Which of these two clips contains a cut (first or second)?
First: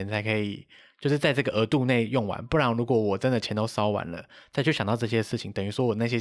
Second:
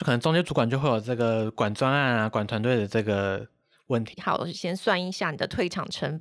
second